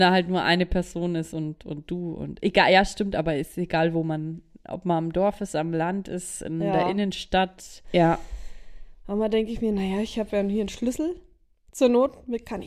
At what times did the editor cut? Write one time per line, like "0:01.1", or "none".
0:07.8